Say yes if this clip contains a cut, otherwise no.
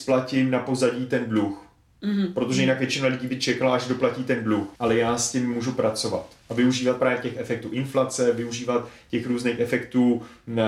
yes